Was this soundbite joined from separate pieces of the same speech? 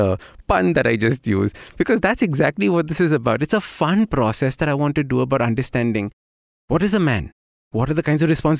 no; 0 cuts

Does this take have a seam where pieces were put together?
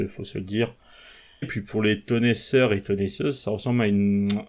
yes; 1 cut; at 1.4 s

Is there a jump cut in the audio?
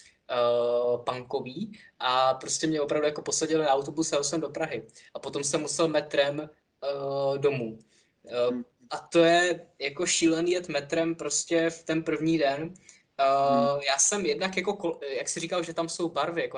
no; 0 cuts

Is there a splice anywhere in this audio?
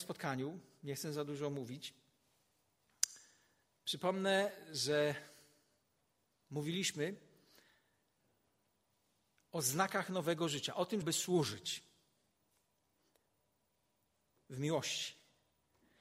yes; 1 cut; at 11.0 s

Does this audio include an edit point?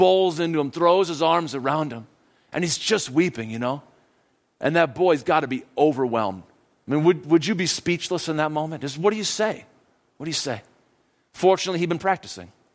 no; 0 cuts

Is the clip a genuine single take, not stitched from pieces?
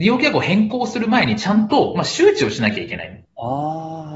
no; 1 cut; at 3.3 s

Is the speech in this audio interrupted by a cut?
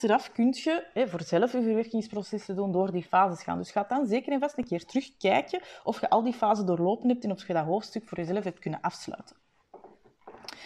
no; 0 cuts

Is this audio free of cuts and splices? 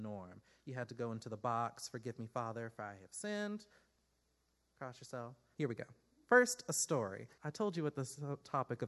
no; 2 cuts; at 5.5 s, 7.4 s

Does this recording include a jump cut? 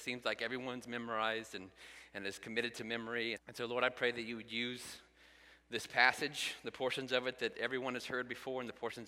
yes; 1 cut; at 3.3 s

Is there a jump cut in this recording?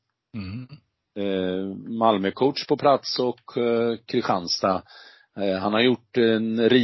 no; 0 cuts

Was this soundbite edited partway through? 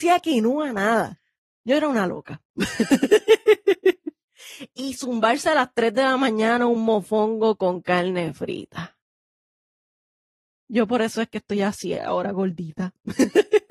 no; 0 cuts

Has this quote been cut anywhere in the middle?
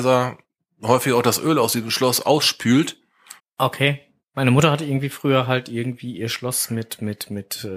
yes; 1 cut; at 3.4 s

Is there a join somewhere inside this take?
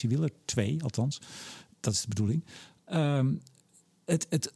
no; 0 cuts

